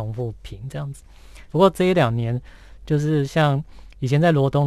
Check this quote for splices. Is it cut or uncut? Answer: cut